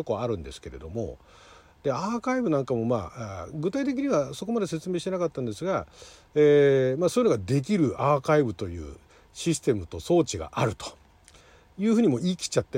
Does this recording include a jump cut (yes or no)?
no